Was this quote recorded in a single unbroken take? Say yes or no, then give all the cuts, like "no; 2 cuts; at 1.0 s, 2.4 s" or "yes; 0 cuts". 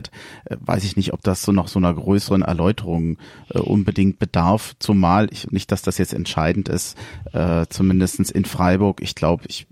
yes; 0 cuts